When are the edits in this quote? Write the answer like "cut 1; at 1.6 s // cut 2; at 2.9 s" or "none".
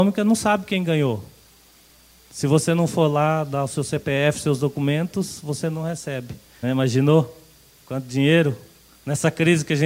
cut 1; at 6.6 s